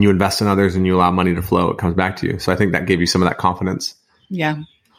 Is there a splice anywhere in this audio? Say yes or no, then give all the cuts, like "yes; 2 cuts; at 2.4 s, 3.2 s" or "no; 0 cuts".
no; 0 cuts